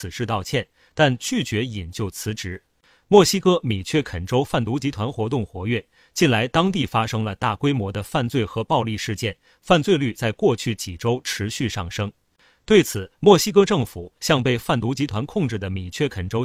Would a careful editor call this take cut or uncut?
uncut